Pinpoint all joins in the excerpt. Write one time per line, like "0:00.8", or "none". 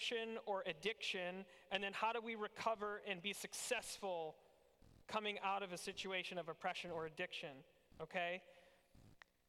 none